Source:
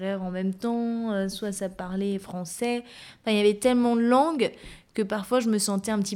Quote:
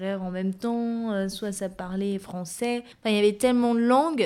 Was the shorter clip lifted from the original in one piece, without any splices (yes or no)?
no